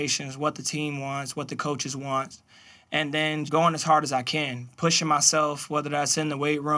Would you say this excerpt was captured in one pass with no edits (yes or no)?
no